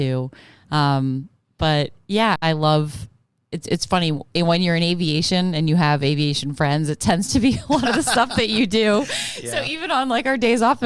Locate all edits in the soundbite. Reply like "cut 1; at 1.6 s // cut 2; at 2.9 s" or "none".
cut 1; at 2.4 s